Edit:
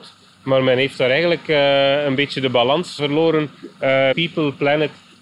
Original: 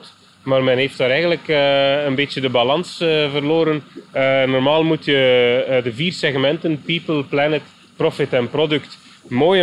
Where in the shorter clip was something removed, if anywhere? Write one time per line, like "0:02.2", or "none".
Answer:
0:03.0
0:04.1